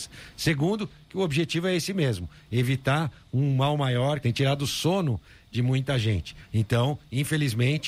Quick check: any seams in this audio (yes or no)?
yes